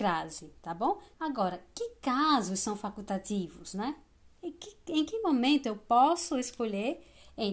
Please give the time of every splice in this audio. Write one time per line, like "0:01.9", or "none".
0:01.1